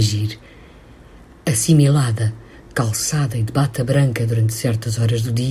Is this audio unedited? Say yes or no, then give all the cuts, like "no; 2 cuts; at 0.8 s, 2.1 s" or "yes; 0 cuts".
yes; 0 cuts